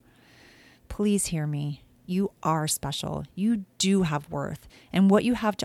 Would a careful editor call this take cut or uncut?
uncut